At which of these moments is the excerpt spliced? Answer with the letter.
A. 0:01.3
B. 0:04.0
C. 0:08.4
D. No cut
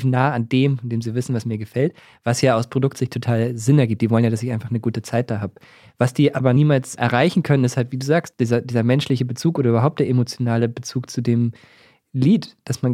D